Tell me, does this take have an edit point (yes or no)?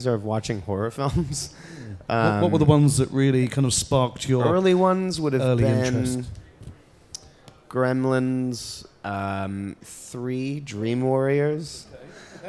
yes